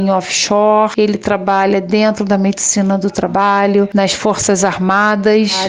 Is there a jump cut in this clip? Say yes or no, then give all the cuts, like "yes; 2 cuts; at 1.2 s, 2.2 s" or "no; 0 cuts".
no; 0 cuts